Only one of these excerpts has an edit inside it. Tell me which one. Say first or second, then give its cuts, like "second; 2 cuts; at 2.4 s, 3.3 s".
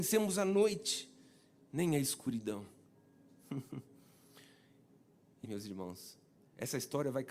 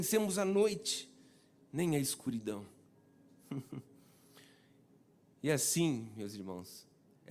first; 1 cut; at 5.4 s